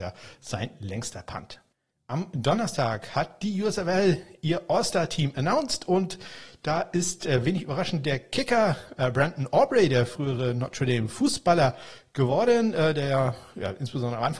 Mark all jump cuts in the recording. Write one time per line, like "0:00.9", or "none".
none